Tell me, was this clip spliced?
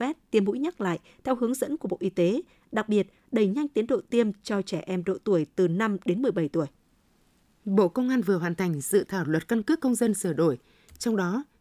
no; 0 cuts

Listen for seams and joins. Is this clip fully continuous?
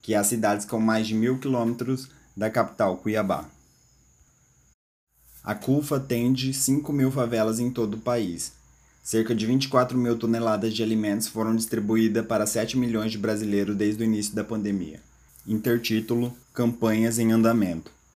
no; 2 cuts; at 15.3 s, 16.4 s

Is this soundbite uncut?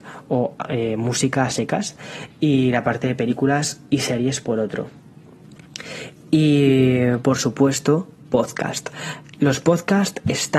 yes; 0 cuts

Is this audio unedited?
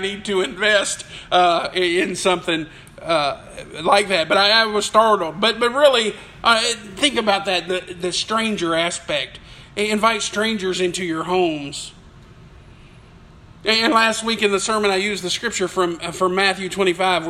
yes; 0 cuts

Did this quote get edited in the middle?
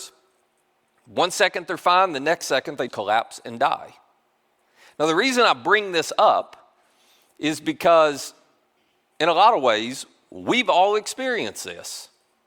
yes; 1 cut; at 2.9 s

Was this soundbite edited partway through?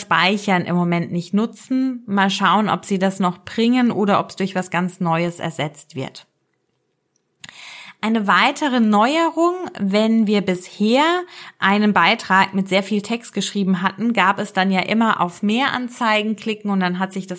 no; 0 cuts

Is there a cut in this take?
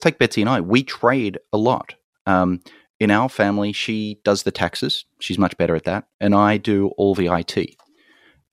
no; 0 cuts

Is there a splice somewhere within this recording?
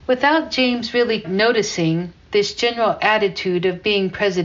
yes; 1 cut; at 1.2 s

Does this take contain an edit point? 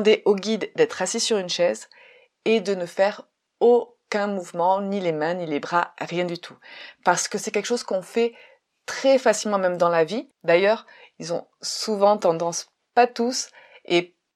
no; 0 cuts

